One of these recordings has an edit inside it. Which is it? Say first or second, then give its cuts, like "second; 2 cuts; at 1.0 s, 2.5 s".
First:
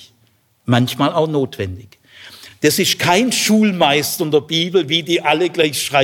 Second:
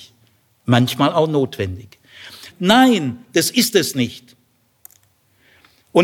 second; 1 cut; at 2.5 s